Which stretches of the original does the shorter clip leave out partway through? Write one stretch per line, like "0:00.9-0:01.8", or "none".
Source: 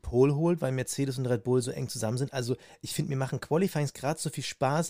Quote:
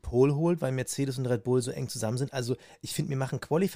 none